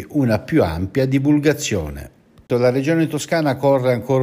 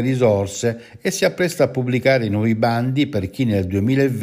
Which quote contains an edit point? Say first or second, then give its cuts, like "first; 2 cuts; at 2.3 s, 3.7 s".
first; 1 cut; at 2.5 s